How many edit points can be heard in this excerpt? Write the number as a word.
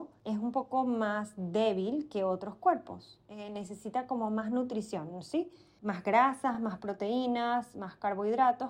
zero